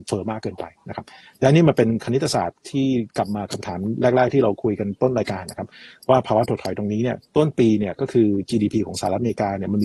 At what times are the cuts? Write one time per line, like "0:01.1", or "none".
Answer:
0:07.3